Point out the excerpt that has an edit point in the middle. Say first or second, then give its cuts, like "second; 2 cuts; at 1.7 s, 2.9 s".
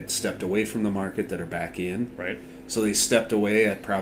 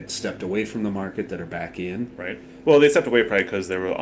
second; 1 cut; at 2.6 s